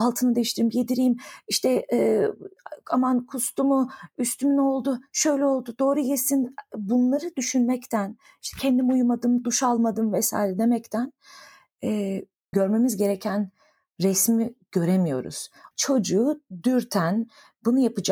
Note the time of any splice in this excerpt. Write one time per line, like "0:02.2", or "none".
0:12.5
0:15.7